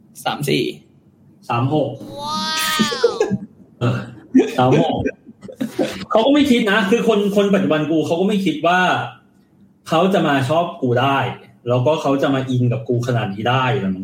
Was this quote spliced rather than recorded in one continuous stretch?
yes; 1 cut; at 3.8 s

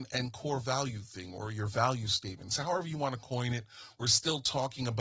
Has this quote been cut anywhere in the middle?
no; 0 cuts

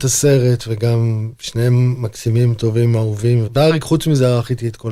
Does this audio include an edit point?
yes; 1 cut; at 3.5 s

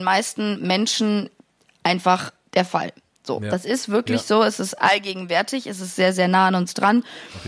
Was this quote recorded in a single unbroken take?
yes; 0 cuts

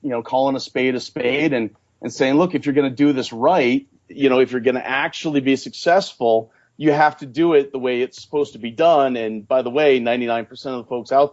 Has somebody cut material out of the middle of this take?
no; 0 cuts

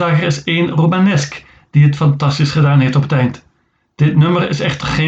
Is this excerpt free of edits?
yes; 0 cuts

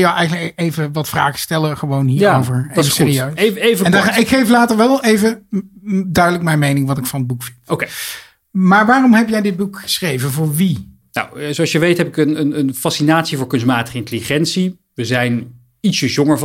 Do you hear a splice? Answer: no; 0 cuts

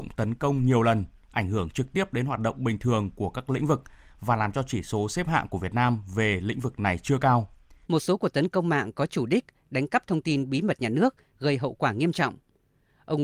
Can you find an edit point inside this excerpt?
yes; 1 cut; at 7.8 s

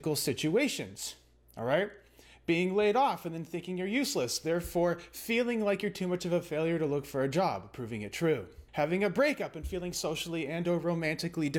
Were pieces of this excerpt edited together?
yes; 1 cut; at 8.7 s

